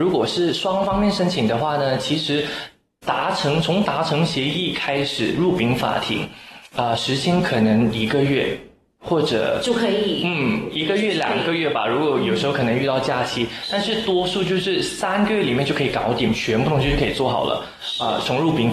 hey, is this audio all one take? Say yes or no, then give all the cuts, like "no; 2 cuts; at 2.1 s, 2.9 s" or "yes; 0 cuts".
yes; 0 cuts